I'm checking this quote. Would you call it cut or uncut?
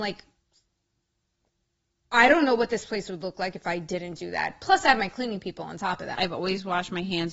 cut